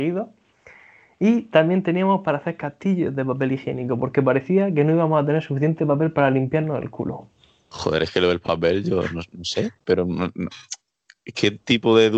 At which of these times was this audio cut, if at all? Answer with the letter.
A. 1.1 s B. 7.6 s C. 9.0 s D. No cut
D